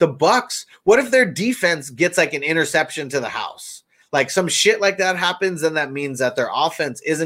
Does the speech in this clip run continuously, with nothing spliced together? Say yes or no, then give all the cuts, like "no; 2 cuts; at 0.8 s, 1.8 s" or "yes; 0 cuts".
yes; 0 cuts